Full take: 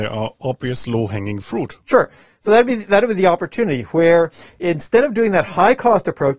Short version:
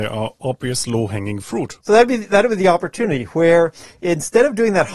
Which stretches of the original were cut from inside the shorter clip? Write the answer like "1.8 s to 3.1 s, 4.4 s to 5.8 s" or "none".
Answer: 1.8 s to 2.4 s